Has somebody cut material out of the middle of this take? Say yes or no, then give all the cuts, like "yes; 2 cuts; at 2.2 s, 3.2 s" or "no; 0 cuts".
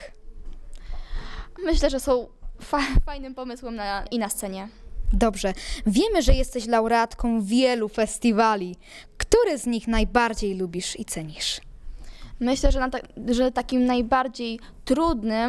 yes; 2 cuts; at 1.6 s, 4.1 s